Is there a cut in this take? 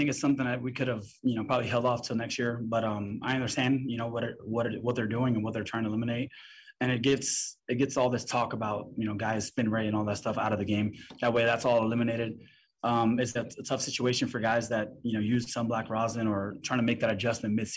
yes; 1 cut; at 13.4 s

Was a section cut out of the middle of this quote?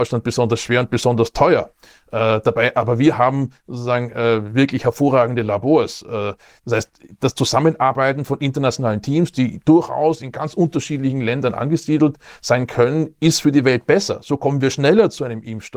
no; 0 cuts

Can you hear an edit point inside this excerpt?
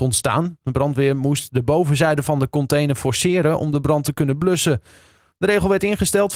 yes; 1 cut; at 5.3 s

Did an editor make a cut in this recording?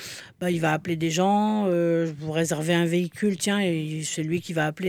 no; 0 cuts

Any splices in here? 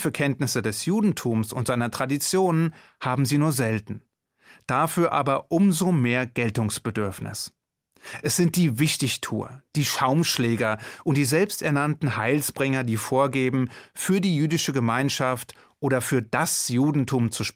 no; 0 cuts

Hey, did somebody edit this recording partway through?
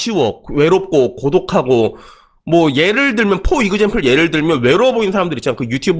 no; 0 cuts

